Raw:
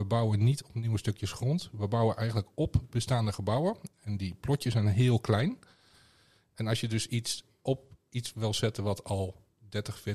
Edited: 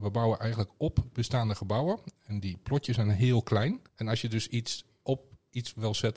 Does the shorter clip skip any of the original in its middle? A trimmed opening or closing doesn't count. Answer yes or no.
yes